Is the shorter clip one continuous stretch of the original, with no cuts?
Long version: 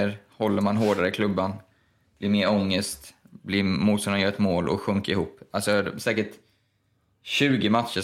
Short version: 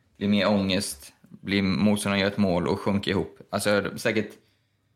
yes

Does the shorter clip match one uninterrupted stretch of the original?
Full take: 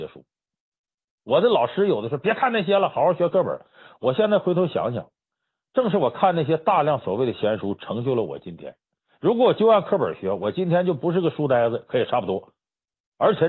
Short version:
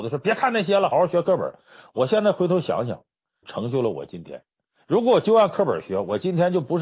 no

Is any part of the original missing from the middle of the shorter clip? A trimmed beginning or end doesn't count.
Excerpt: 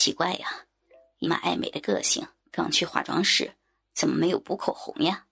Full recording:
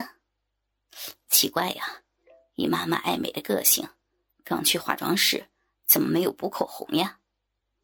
yes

